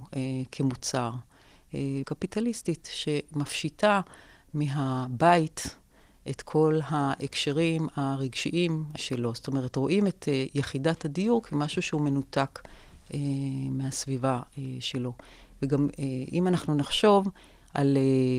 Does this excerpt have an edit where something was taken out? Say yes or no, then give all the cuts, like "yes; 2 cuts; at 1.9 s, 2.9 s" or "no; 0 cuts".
yes; 2 cuts; at 2.0 s, 9.0 s